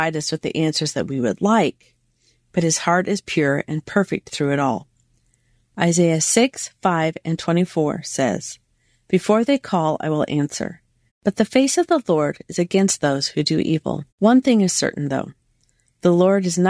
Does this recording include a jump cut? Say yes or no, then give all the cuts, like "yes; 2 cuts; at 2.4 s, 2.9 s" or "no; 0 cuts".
yes; 2 cuts; at 11.1 s, 14.1 s